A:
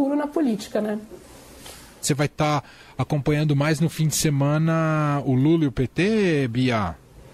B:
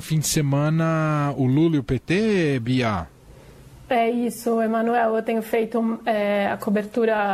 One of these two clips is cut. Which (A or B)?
A